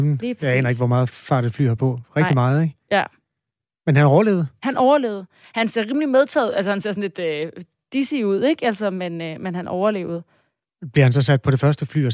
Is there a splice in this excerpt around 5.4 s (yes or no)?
no